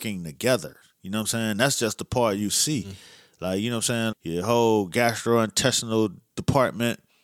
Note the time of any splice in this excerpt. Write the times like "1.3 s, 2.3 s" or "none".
4.1 s